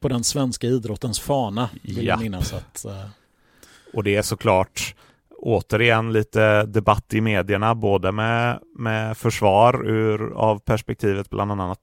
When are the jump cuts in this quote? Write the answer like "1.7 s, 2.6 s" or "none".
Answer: none